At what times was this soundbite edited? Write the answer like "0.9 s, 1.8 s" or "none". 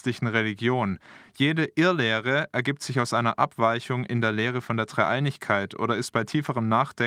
none